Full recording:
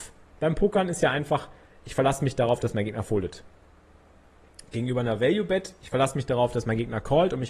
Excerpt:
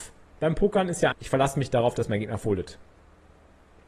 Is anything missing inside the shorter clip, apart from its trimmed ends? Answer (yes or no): yes